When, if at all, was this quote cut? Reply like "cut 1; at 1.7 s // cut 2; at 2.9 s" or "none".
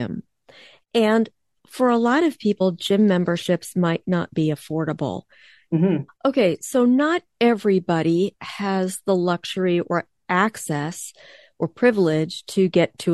cut 1; at 6.1 s